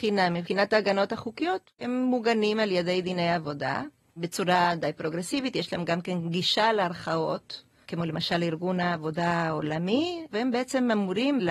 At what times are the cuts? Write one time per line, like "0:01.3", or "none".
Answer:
0:07.9
0:10.3